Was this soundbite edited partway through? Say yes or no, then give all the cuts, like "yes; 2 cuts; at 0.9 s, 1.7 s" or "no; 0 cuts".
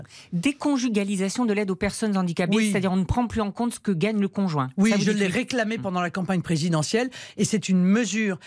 no; 0 cuts